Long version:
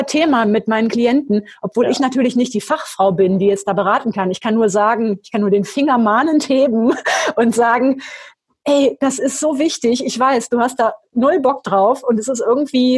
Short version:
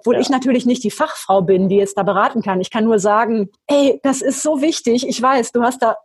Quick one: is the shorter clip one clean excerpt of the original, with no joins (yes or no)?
no